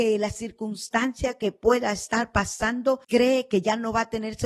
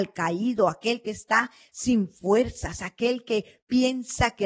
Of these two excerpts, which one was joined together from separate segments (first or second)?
first